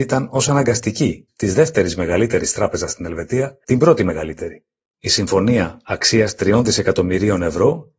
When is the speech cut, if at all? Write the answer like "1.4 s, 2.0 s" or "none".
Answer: 1.3 s, 3.6 s